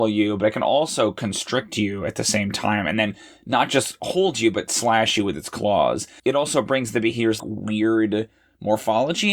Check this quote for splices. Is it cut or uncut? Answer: cut